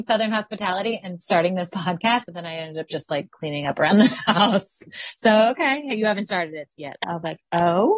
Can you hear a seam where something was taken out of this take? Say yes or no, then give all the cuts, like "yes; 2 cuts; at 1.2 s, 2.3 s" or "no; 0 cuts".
yes; 2 cuts; at 2.2 s, 7.0 s